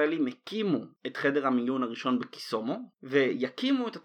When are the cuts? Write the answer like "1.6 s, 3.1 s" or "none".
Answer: 2.9 s